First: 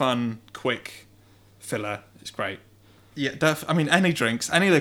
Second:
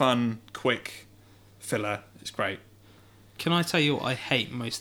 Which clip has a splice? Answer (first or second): first